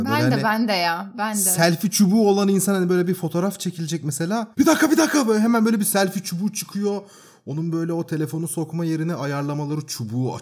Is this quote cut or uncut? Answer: cut